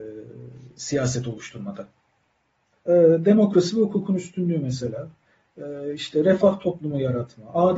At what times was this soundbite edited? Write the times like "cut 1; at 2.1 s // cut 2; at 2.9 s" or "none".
cut 1; at 2.7 s